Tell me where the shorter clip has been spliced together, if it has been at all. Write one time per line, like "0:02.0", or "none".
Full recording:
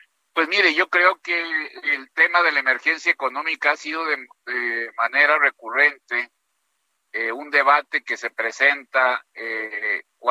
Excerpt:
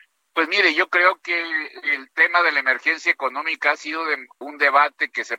0:04.4